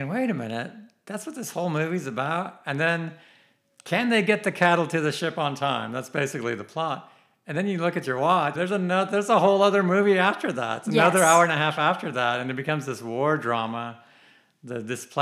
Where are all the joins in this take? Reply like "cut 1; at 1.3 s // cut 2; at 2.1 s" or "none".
cut 1; at 8.5 s